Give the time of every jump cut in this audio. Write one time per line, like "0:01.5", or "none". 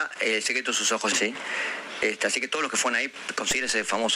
0:01.1